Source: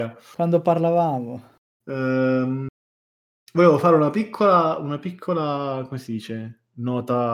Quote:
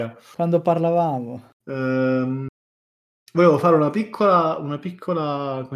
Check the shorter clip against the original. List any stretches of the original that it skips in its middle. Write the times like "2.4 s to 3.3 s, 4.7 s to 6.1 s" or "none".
1.5 s to 1.7 s

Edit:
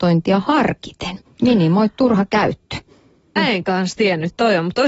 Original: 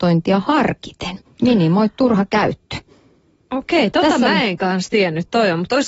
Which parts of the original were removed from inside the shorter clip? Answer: 3.4 s to 4.3 s

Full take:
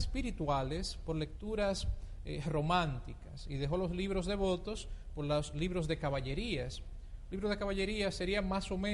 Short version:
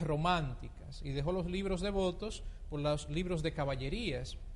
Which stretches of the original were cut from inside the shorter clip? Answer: none

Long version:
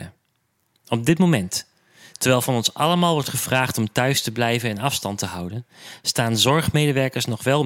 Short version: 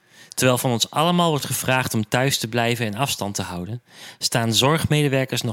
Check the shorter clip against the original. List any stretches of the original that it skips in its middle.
none

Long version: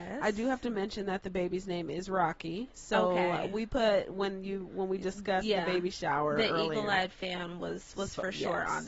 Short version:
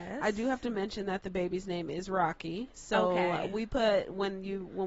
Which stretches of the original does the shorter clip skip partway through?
none

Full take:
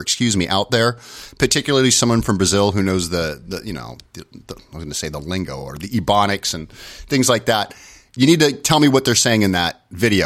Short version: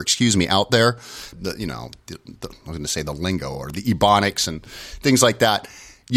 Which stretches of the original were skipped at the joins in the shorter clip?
1.3 s to 3.4 s

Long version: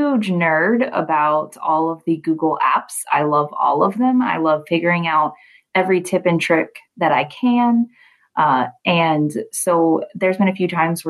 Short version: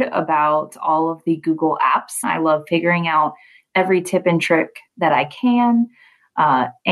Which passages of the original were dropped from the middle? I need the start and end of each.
3.0 s to 4.2 s

